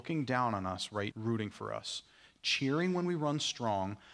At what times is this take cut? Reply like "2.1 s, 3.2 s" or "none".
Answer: 1.1 s